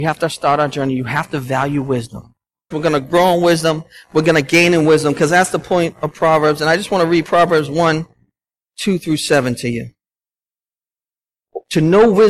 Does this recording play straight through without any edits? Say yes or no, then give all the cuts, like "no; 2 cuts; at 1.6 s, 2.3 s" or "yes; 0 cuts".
no; 1 cut; at 2.7 s